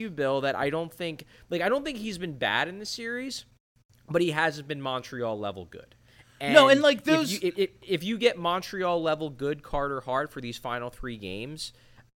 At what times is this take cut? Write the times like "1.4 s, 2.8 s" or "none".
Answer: none